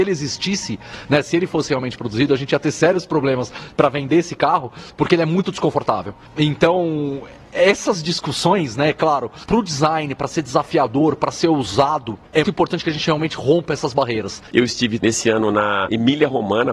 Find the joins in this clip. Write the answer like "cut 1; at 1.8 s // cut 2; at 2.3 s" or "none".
cut 1; at 12.4 s